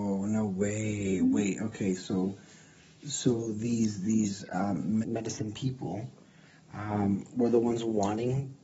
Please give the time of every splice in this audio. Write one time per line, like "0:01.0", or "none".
0:05.0